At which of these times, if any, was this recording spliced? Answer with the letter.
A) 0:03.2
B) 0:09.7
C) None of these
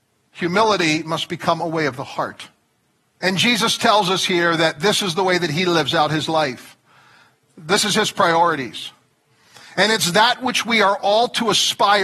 A